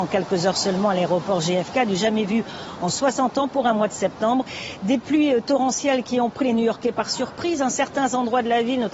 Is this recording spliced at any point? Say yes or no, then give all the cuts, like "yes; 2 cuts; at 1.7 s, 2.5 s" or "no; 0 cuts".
no; 0 cuts